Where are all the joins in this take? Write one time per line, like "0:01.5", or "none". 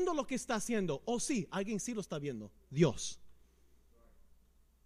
none